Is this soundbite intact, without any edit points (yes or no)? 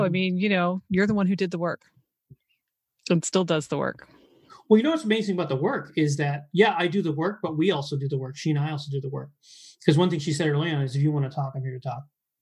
yes